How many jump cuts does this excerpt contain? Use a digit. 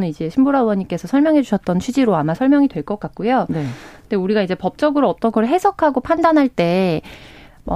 0